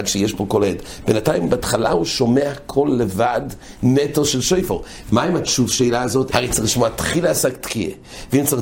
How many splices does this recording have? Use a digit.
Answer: 2